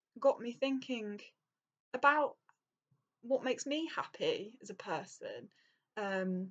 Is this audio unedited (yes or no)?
yes